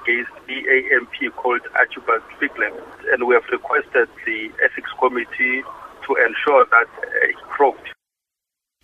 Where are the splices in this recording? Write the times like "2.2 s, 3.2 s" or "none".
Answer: 7.3 s